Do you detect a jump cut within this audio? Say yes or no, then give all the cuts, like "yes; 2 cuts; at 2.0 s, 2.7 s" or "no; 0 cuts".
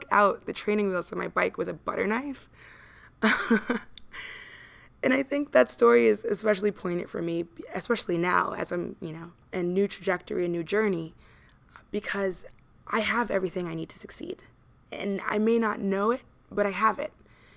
yes; 1 cut; at 9.4 s